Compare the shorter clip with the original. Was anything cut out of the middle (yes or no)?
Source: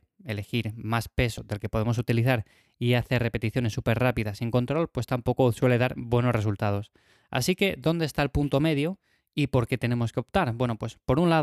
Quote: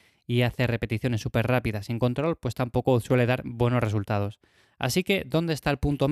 no